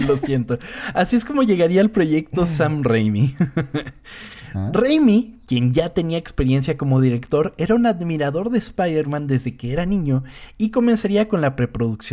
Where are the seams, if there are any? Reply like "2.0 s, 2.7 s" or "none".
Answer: none